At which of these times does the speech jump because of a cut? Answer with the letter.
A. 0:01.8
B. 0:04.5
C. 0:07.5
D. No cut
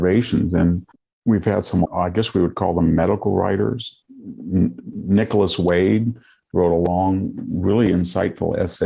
A